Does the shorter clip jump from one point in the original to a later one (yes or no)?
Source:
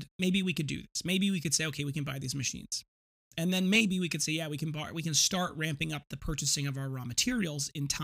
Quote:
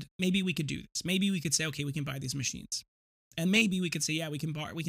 yes